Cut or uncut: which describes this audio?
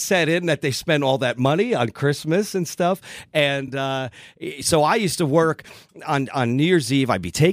uncut